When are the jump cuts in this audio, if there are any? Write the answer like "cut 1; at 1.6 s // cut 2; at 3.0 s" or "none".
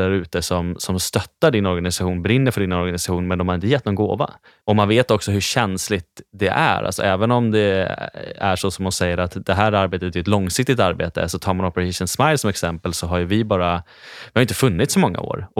cut 1; at 4.6 s